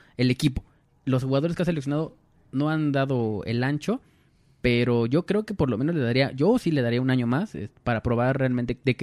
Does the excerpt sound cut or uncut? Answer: uncut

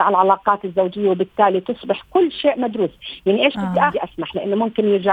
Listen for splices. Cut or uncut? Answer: cut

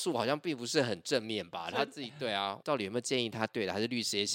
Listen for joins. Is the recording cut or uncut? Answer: cut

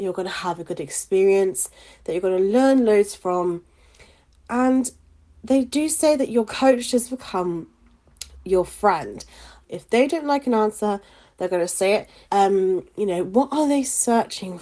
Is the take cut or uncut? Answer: cut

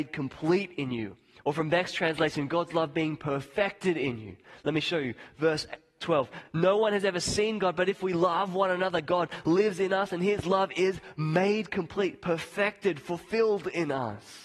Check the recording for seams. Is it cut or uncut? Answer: uncut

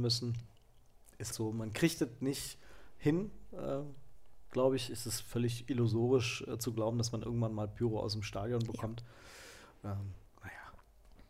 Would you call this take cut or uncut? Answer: cut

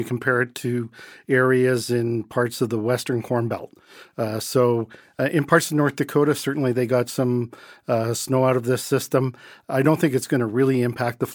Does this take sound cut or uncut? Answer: uncut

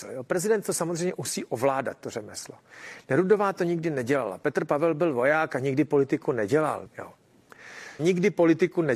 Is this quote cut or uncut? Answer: cut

